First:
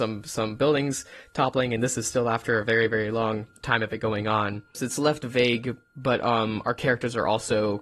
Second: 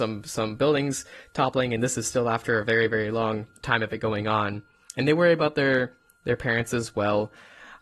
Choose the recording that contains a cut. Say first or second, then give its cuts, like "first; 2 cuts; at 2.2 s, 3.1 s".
first; 1 cut; at 4.7 s